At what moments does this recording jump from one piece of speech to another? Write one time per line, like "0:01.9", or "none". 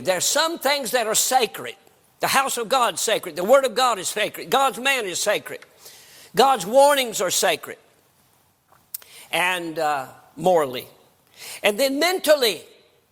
none

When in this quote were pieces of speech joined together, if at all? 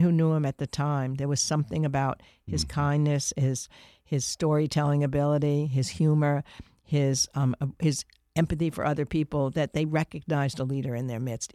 none

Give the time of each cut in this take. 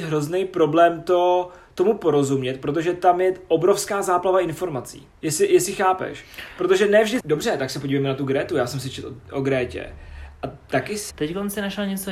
0:05.2
0:07.2
0:11.1

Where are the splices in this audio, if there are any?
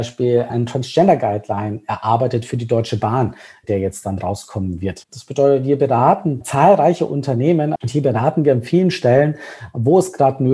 0:05.1
0:07.8

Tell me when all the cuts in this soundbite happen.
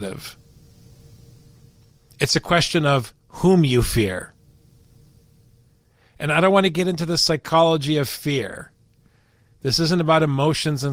none

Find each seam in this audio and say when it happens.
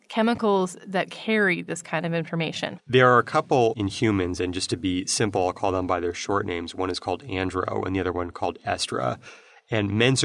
0:02.8

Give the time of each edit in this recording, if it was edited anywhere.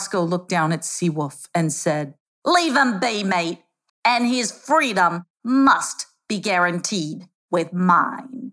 0:03.9

